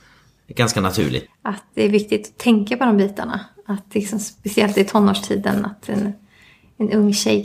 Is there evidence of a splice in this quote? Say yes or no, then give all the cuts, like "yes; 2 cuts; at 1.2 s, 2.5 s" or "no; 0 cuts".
yes; 1 cut; at 1.3 s